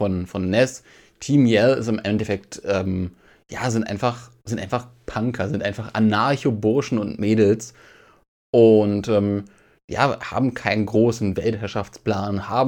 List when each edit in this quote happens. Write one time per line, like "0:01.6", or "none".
none